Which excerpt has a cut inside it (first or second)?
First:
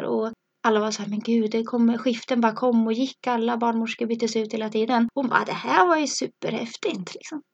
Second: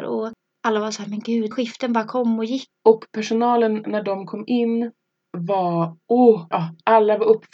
second